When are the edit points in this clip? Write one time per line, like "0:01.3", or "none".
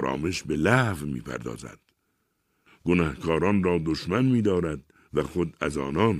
0:02.7